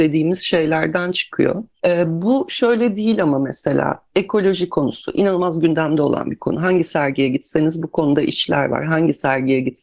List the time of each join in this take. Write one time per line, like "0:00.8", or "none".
none